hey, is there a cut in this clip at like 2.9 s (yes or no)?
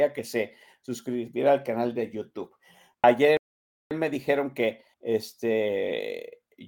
yes